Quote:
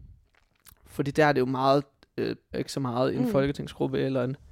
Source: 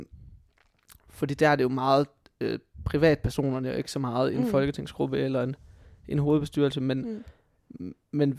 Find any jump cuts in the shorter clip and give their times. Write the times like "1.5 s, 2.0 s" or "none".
2.5 s